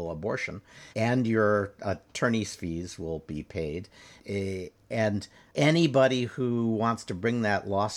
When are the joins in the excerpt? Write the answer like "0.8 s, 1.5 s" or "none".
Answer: 0.9 s